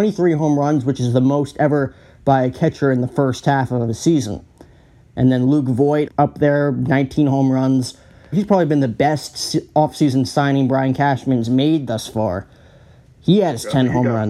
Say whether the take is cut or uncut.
cut